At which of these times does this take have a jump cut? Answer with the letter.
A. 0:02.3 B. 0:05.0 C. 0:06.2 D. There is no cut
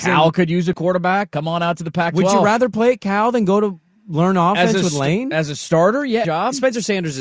C